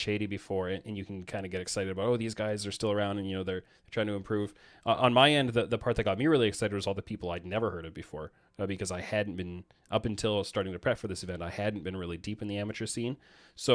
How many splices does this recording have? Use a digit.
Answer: 0